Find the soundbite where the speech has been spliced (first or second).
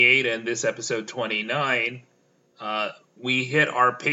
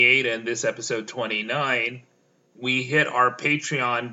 second